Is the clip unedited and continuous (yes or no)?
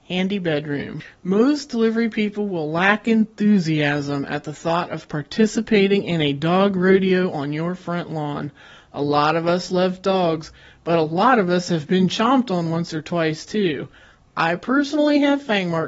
yes